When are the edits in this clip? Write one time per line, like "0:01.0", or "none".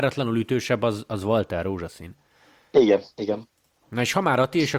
none